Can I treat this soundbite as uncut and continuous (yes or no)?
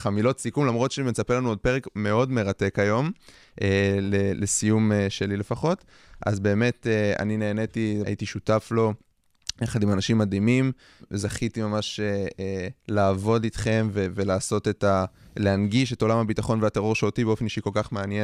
no